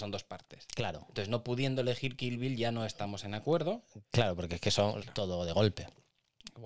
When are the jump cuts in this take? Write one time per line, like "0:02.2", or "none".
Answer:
0:05.0

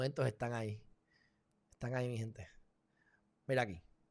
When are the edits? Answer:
none

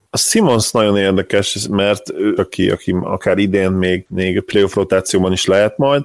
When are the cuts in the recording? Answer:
0:02.4

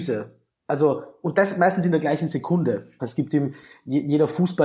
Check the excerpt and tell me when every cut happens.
0:03.0

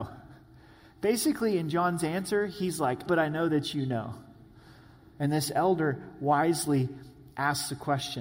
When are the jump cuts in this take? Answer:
0:03.1
0:05.2

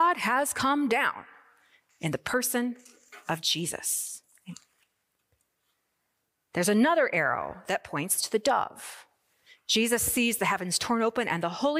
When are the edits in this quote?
none

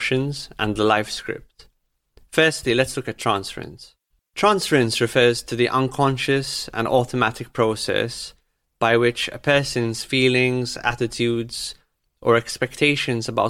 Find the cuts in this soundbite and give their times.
0:04.2

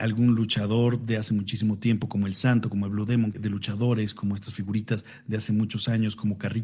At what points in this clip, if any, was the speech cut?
0:03.3

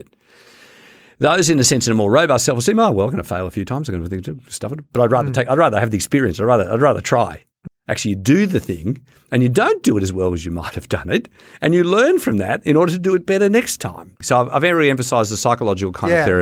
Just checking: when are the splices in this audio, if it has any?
0:07.7
0:14.2

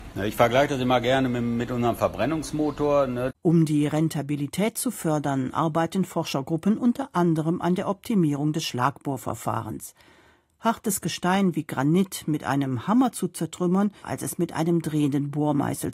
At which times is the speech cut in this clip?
0:03.3
0:14.0

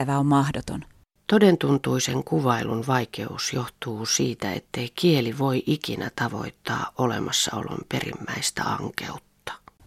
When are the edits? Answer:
none

